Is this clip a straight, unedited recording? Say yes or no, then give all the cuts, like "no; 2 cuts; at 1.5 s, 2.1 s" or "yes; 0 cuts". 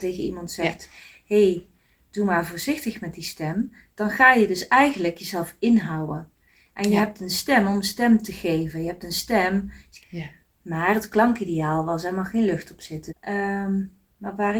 no; 2 cuts; at 10.0 s, 13.1 s